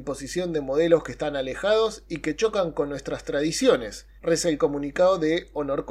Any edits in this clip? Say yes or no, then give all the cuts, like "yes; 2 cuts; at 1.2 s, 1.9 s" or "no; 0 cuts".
yes; 1 cut; at 4.2 s